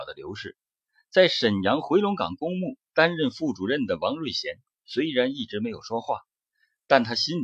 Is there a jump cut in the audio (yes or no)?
no